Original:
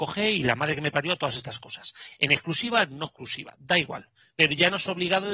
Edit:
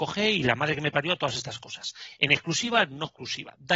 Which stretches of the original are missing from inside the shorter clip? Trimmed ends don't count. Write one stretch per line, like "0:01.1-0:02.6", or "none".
none